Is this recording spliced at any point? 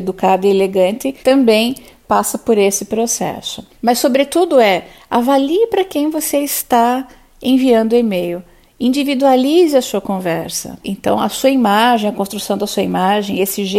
yes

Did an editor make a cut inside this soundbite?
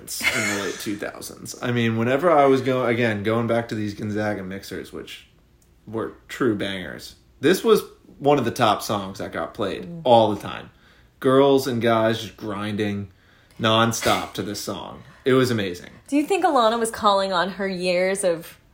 no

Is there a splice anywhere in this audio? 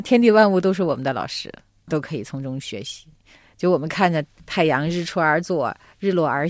no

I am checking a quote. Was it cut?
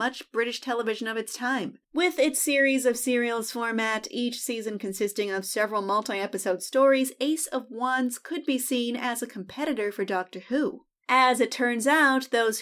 yes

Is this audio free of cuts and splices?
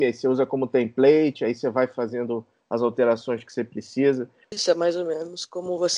no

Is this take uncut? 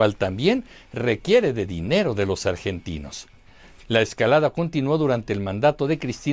no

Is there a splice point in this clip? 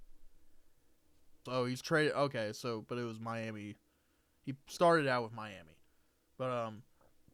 yes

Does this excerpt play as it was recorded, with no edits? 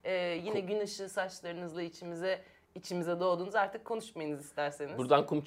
yes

